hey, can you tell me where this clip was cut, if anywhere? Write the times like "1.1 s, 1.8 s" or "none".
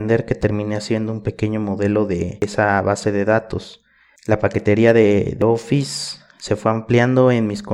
4.2 s